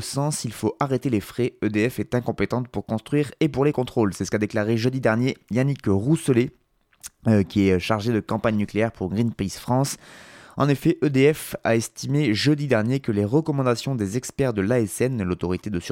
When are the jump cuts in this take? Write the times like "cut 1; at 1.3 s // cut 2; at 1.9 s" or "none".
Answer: none